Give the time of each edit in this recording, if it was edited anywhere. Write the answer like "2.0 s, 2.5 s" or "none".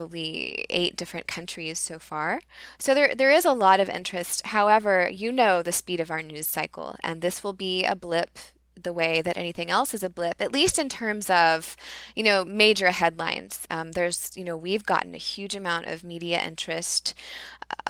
13.7 s